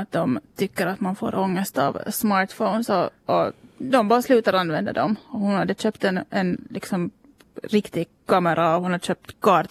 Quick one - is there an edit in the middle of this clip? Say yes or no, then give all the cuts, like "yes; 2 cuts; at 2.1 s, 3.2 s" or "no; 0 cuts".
no; 0 cuts